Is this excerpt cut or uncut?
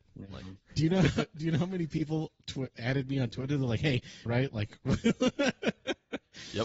cut